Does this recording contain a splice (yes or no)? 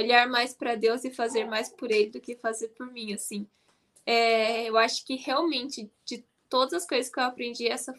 no